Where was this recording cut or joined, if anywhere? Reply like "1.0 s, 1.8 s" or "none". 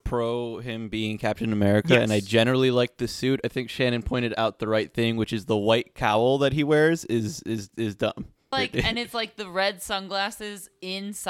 8.5 s